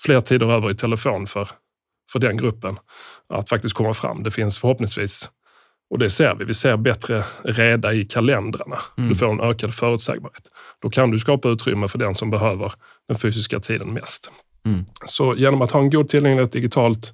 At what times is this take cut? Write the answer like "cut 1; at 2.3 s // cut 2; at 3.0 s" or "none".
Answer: none